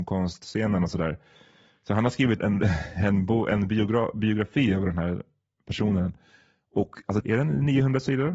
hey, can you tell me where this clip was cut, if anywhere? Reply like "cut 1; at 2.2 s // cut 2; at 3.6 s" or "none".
cut 1; at 2.4 s // cut 2; at 7.2 s